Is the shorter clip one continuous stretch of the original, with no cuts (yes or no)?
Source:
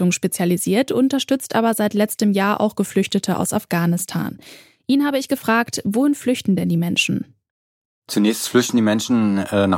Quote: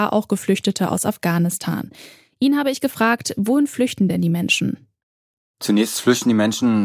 yes